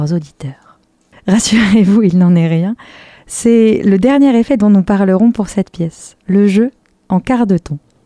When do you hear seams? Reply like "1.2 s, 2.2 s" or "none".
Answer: 1.1 s